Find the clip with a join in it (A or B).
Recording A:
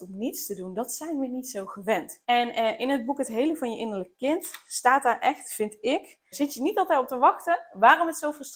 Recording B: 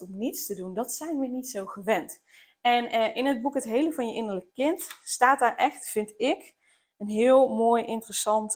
A